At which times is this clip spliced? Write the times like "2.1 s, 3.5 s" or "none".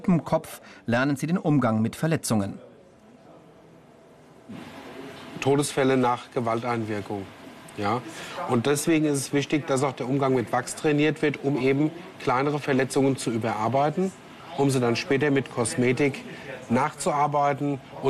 none